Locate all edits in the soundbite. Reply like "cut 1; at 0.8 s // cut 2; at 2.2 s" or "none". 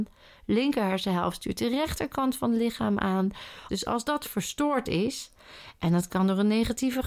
cut 1; at 3.7 s